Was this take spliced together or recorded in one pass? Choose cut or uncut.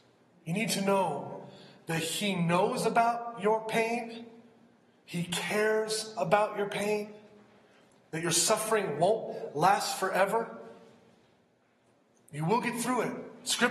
uncut